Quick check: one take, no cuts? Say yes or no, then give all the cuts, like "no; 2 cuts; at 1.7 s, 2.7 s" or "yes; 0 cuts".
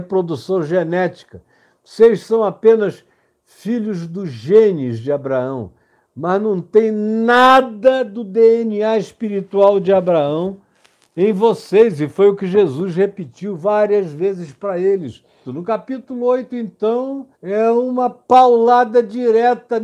no; 2 cuts; at 15.4 s, 17.3 s